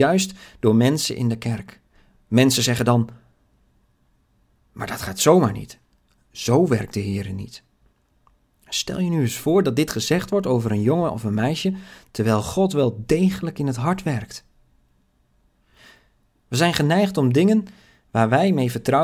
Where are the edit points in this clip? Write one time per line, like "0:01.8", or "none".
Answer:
none

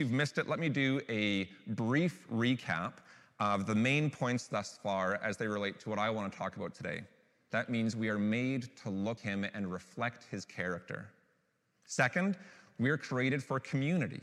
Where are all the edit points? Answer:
0:07.5
0:09.2

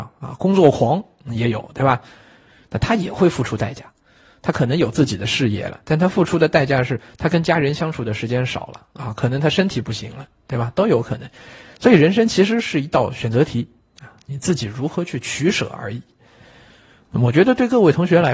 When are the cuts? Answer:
none

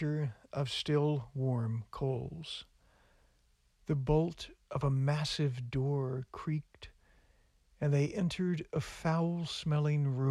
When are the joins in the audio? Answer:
0:03.7

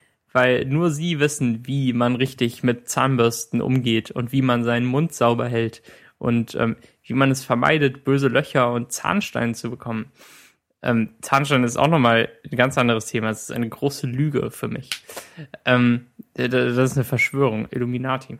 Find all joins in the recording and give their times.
none

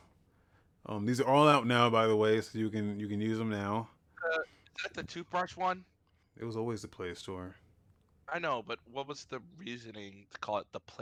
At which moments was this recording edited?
0:06.2

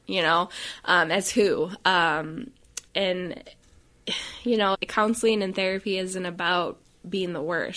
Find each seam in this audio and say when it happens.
0:02.9
0:04.7

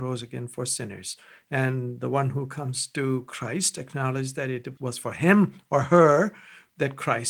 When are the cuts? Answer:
0:04.8

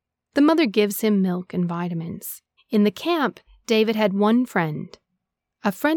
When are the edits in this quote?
0:02.6

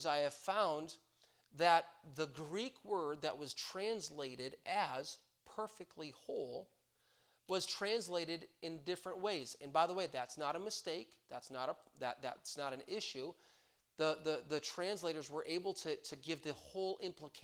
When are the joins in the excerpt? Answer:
none

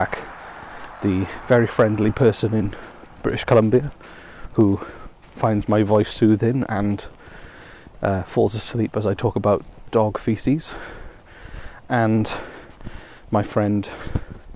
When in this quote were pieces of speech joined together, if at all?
none

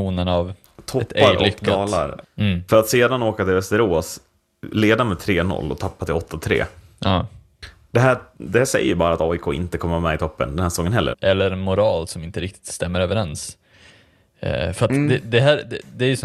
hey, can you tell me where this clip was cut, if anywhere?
0:02.2
0:11.1

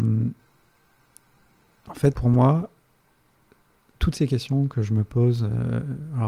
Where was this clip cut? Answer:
0:02.1

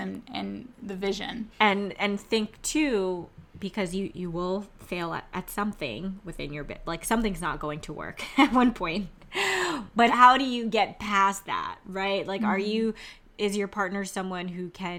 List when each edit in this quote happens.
0:01.5
0:10.1

